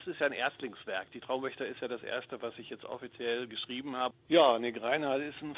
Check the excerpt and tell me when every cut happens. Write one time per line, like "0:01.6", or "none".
0:04.1